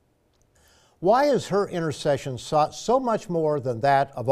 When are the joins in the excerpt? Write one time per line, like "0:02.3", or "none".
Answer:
none